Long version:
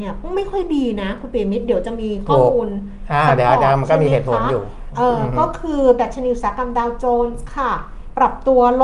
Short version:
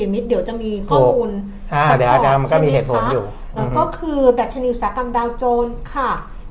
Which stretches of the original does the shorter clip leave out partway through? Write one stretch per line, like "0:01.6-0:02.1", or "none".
0:04.9-0:05.2